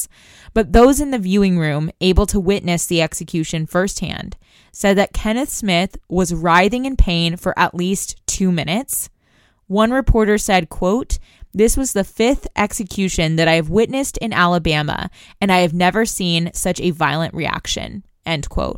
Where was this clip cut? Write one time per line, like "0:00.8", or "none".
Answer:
none